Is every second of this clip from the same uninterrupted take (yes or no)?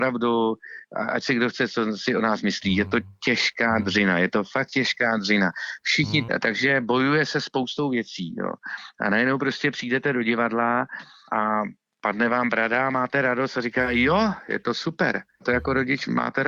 no